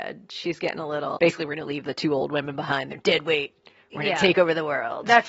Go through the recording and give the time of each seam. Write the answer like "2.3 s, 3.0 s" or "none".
1.2 s

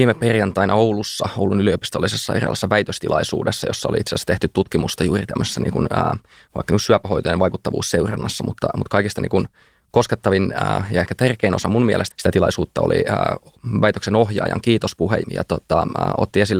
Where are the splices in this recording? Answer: 12.1 s, 15.2 s

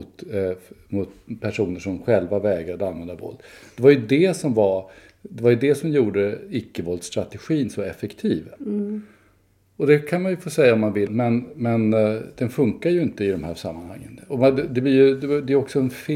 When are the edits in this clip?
8.6 s, 11.1 s

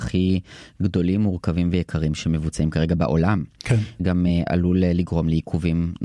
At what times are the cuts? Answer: none

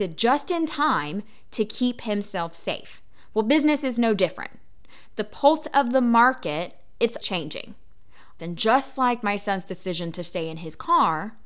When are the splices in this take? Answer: 7.2 s, 8.4 s

